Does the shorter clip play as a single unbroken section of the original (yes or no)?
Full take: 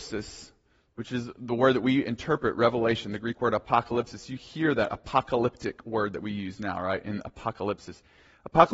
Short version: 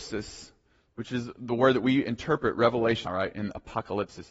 no